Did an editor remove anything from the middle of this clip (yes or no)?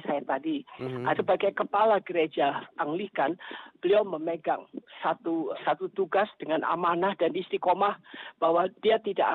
yes